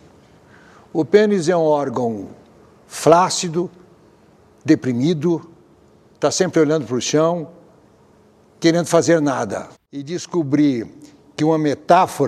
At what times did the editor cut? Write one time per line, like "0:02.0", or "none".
0:09.7